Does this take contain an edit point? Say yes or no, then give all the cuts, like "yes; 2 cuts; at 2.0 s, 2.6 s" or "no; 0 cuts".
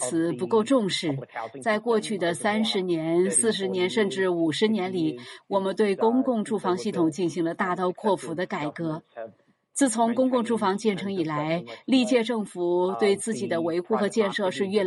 no; 0 cuts